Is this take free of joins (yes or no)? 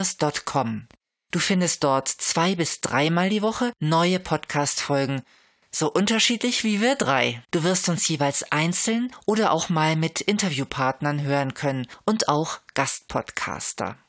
no